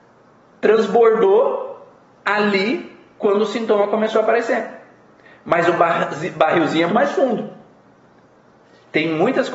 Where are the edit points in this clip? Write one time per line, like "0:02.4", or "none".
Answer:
0:06.9